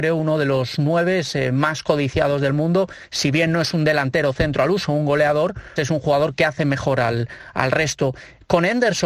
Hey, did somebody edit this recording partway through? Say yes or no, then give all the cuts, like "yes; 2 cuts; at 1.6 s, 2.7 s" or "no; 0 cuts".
yes; 1 cut; at 5.8 s